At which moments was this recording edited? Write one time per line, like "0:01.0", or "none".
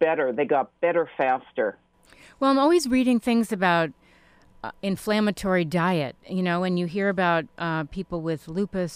none